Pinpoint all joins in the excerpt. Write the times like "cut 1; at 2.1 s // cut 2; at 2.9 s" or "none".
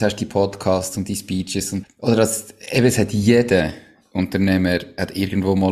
cut 1; at 1.8 s